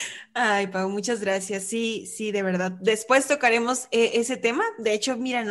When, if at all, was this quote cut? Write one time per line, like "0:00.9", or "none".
none